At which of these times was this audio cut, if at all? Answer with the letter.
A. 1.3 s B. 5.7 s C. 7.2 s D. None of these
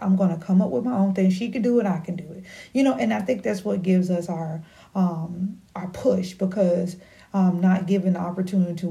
D